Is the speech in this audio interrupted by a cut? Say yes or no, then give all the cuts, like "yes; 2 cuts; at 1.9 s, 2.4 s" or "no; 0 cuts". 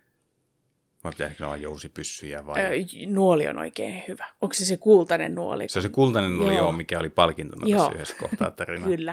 no; 0 cuts